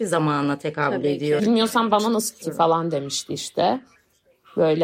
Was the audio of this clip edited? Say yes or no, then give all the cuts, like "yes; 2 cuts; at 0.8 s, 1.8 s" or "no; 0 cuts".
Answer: yes; 2 cuts; at 1.4 s, 2.4 s